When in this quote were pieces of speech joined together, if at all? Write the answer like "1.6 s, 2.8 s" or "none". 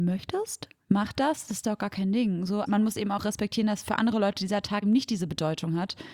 2.7 s, 4.8 s